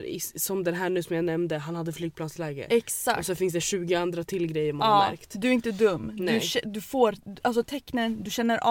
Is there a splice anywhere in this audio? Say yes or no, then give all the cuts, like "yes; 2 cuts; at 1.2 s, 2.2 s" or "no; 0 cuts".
no; 0 cuts